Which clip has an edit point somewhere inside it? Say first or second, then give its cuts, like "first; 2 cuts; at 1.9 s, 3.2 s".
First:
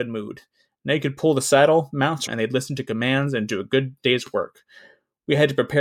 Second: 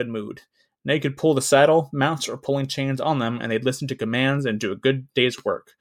first; 1 cut; at 2.3 s